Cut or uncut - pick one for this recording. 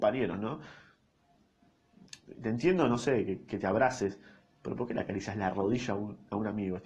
uncut